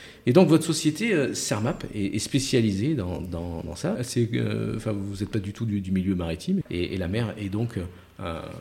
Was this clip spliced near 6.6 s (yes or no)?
yes